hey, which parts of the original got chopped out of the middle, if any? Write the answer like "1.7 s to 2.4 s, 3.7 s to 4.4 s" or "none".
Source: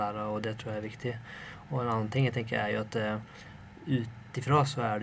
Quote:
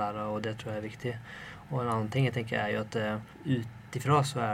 3.3 s to 3.7 s